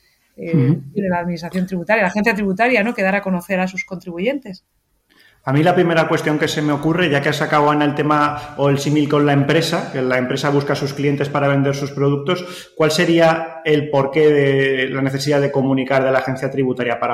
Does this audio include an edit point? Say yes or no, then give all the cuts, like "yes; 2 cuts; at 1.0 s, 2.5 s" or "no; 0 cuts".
no; 0 cuts